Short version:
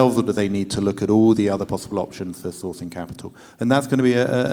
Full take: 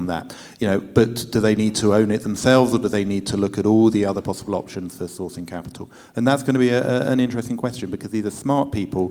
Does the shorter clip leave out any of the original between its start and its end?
no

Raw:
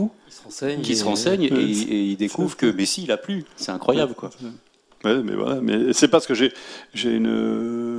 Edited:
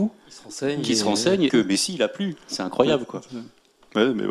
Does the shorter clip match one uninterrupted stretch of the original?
no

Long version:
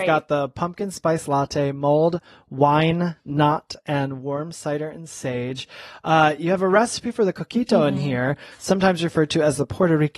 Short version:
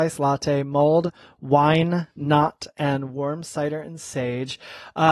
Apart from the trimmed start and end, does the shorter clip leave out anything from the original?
no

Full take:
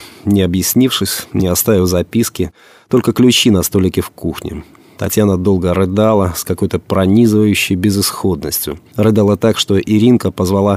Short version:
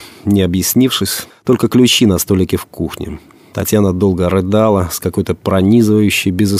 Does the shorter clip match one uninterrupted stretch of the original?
no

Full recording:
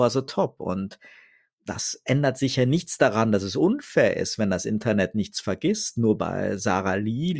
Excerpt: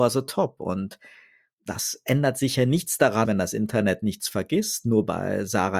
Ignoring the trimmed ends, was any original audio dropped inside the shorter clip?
yes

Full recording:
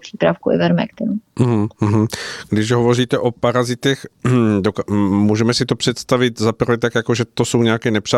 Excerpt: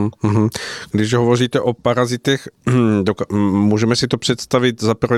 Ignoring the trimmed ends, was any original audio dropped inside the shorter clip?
no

